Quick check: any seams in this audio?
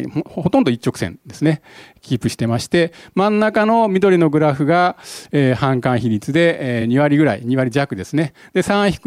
no; 0 cuts

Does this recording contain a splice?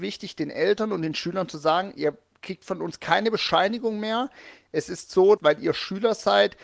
yes; 1 cut; at 5.4 s

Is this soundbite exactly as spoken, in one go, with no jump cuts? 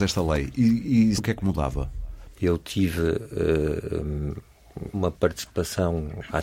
no; 3 cuts; at 1.2 s, 2.3 s, 4.9 s

